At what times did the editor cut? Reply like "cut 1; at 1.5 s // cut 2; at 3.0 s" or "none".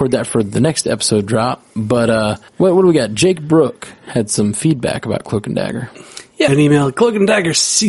cut 1; at 2.5 s // cut 2; at 6.5 s